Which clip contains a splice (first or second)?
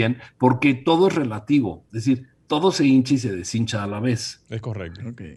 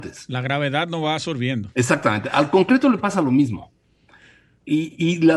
second